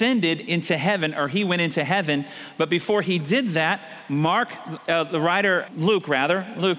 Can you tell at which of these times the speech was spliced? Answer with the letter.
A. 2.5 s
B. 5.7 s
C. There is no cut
B